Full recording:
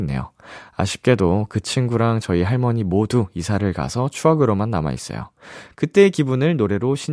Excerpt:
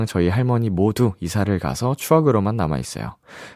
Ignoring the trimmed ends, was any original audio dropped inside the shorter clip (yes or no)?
no